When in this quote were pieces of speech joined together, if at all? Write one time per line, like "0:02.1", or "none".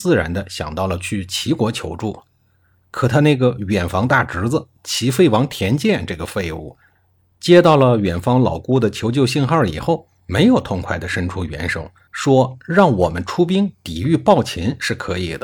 0:12.1